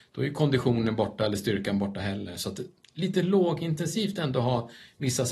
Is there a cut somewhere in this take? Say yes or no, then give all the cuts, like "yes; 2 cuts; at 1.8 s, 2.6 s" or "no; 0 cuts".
no; 0 cuts